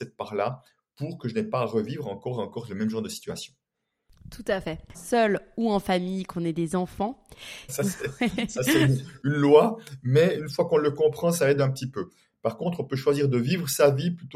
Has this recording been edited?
yes; 2 cuts; at 4.9 s, 7.7 s

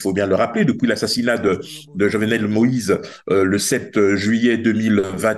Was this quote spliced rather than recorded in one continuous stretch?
no; 0 cuts

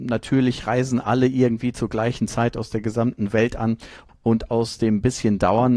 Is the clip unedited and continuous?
no; 1 cut; at 4.1 s

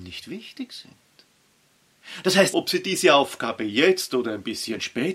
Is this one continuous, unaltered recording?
no; 1 cut; at 2.5 s

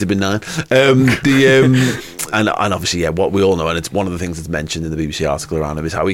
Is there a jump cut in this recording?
yes; 1 cut; at 2.3 s

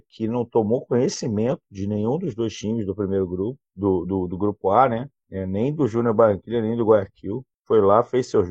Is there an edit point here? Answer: no; 0 cuts

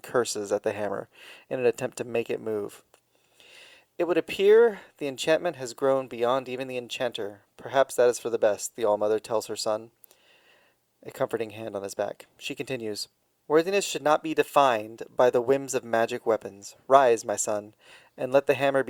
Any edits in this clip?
no; 0 cuts

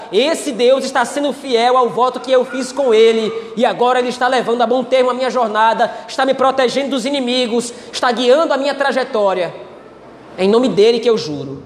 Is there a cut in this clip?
no; 0 cuts

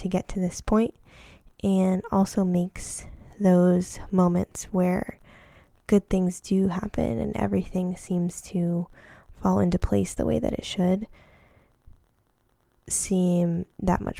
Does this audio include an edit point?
no; 0 cuts

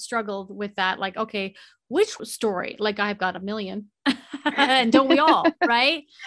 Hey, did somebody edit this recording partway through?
no; 0 cuts

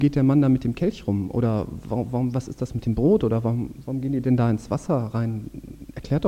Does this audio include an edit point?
no; 0 cuts

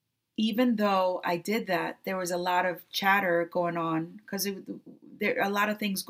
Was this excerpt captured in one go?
yes; 0 cuts

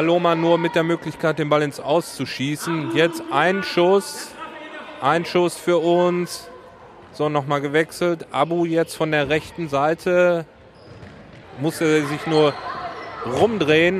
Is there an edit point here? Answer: yes; 1 cut; at 11.4 s

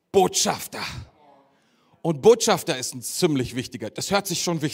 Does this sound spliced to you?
no; 0 cuts

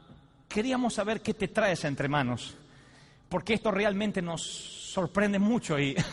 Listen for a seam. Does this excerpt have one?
no; 0 cuts

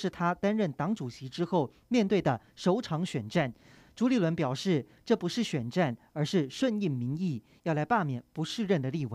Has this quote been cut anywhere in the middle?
no; 0 cuts

